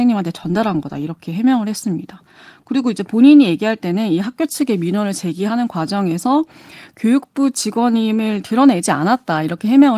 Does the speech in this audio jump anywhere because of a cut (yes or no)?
no